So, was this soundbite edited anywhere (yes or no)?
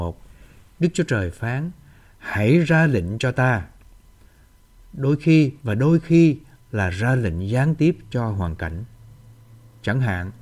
yes